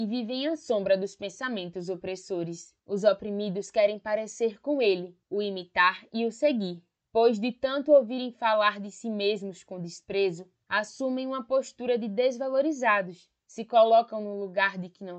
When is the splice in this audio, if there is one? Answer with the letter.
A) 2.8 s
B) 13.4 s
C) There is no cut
A